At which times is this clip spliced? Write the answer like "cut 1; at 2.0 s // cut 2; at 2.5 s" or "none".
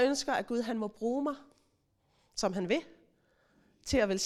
none